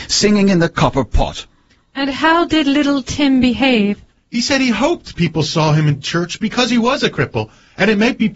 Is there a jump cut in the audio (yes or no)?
yes